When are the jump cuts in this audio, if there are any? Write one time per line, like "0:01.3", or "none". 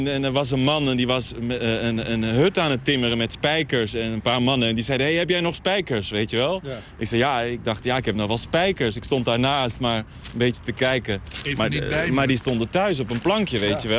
none